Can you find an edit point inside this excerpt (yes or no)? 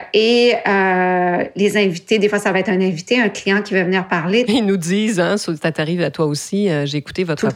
yes